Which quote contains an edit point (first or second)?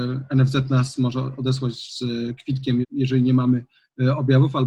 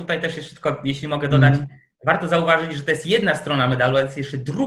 first